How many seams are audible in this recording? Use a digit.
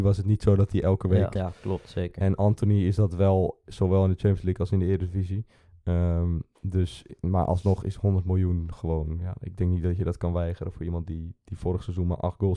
1